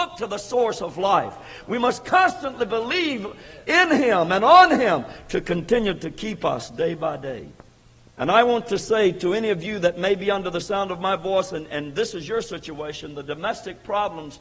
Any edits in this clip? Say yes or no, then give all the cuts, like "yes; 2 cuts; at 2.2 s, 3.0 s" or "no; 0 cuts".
yes; 1 cut; at 8.0 s